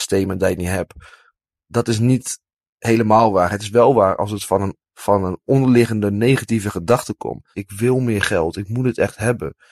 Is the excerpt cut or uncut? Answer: cut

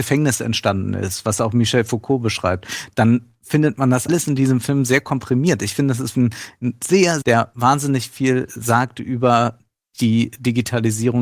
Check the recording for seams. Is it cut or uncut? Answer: cut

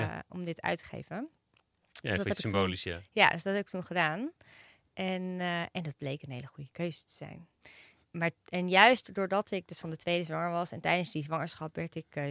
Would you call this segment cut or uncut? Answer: uncut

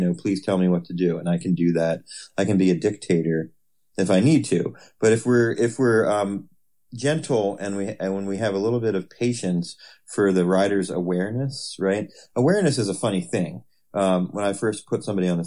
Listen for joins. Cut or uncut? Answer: uncut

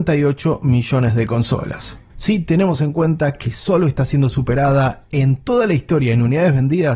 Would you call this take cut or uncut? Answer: cut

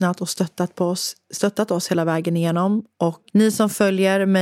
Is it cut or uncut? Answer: cut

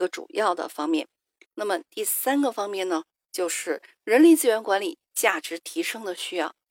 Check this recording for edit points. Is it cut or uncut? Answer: cut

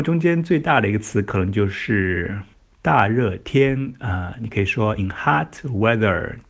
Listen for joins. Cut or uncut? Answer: cut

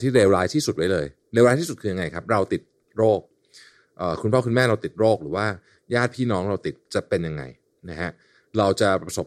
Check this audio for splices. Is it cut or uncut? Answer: uncut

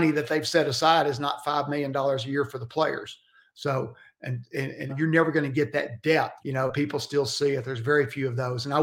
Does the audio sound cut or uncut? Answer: cut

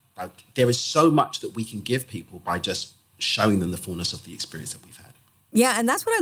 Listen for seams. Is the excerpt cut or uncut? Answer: uncut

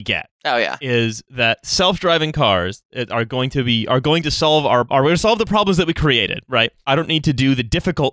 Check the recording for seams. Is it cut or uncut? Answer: cut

